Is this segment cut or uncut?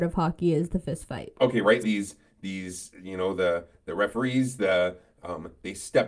cut